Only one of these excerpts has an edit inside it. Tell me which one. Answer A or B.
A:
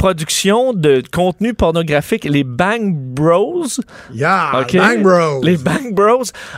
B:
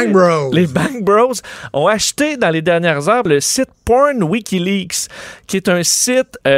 B